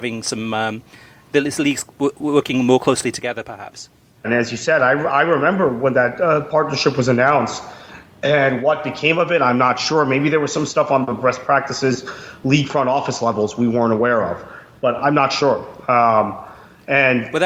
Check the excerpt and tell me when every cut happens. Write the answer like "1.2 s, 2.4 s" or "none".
4.2 s